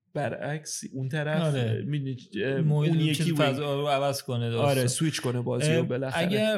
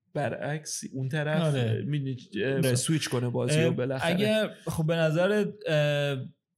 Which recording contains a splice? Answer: second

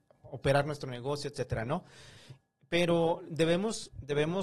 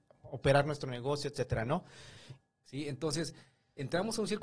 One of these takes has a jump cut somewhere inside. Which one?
second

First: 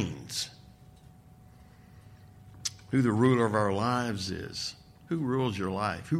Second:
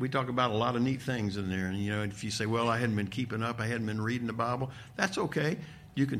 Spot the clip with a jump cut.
first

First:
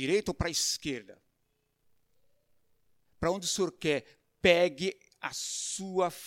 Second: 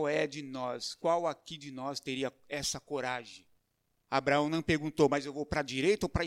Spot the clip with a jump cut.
first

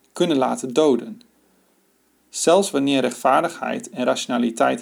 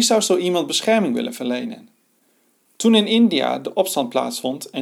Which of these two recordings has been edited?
first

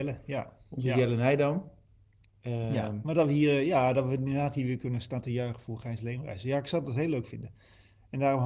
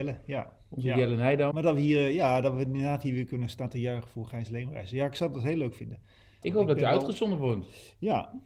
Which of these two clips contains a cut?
second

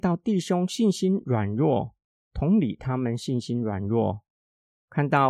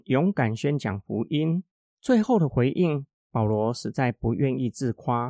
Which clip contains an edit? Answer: second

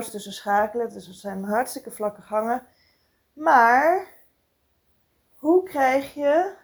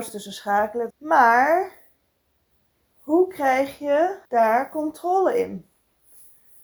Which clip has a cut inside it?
second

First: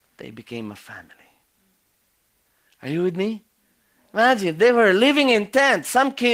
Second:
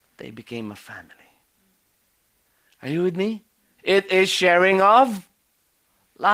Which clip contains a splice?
second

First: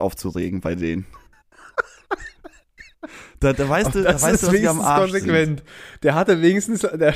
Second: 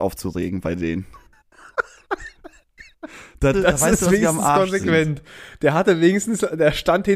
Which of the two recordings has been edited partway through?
second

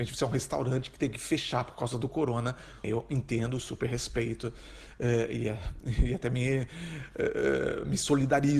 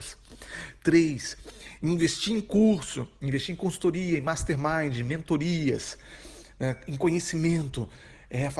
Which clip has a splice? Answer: first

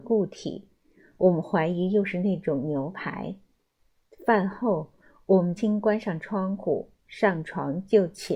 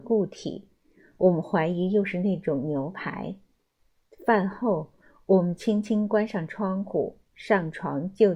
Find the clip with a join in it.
first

